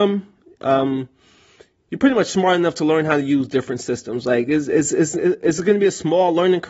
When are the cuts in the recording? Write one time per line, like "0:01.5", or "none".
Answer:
none